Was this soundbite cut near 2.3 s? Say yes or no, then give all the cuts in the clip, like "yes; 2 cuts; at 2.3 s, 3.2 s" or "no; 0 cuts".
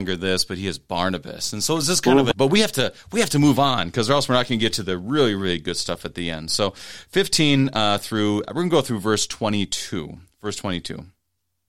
yes; 1 cut; at 2.3 s